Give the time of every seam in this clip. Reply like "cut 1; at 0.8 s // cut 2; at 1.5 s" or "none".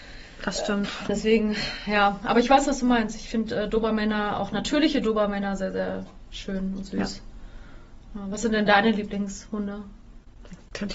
cut 1; at 1.1 s